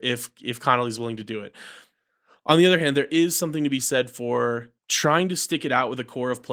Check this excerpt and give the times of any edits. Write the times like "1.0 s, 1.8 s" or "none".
4.8 s